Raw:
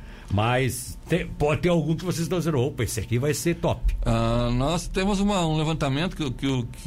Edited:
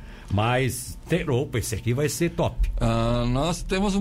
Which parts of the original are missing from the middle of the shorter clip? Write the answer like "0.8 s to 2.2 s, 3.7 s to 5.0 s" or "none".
1.3 s to 2.5 s